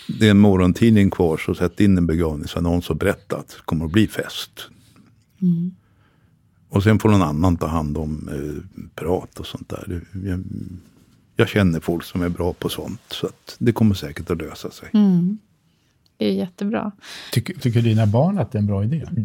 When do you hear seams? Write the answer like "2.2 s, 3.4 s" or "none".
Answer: 17.6 s

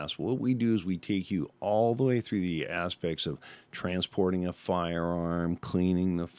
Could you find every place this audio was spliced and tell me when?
none

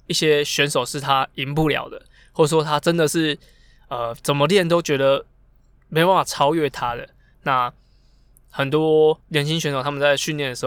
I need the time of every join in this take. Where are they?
7.3 s, 9.2 s

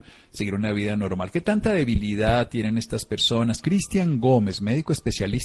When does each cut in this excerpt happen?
3.6 s

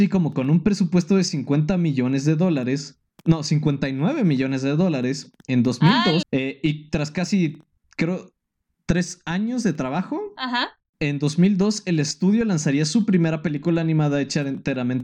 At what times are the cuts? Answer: 6.2 s

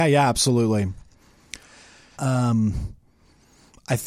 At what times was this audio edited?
2.1 s

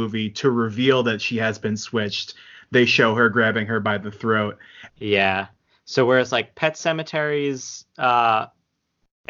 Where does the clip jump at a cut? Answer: 4.9 s

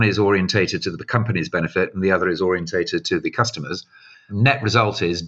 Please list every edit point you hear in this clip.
4.1 s

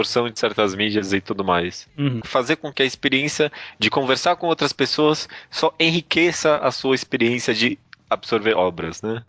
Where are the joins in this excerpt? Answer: 2.2 s

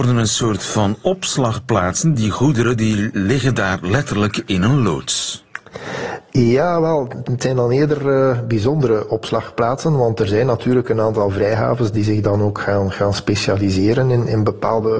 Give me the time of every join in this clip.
none

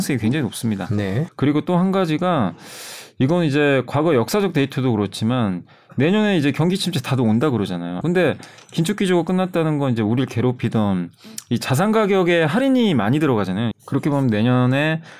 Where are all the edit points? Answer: 1.3 s, 8.0 s, 13.7 s

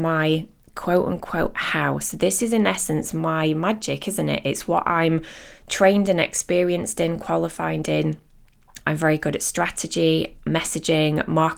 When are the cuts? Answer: 8.8 s

